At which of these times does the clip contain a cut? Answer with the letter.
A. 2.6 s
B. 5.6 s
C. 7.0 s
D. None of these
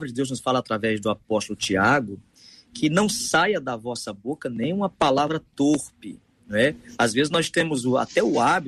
D